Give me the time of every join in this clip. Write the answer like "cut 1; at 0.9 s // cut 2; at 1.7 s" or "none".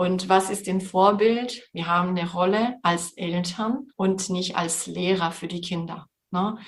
cut 1; at 1.7 s // cut 2; at 3.9 s

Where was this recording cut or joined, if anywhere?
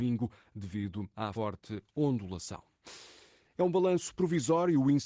cut 1; at 1.3 s

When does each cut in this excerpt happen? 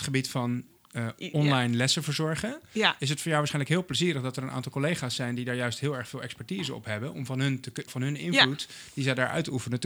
cut 1; at 7.9 s

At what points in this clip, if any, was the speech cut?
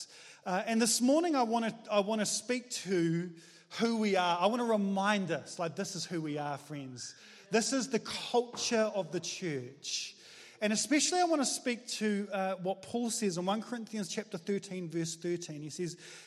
none

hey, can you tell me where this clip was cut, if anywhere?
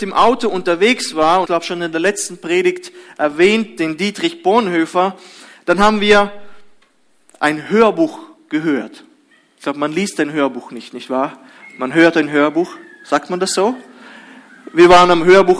cut 1; at 1.4 s

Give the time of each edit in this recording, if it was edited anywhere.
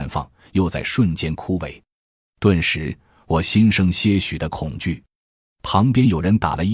none

